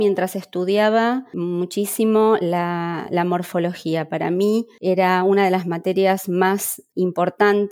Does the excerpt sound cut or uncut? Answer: uncut